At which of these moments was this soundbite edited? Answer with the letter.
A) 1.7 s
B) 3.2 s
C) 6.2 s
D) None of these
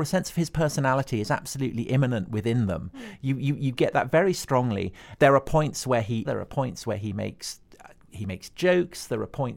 C